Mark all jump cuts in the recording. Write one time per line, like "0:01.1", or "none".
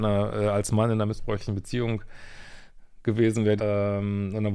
0:03.6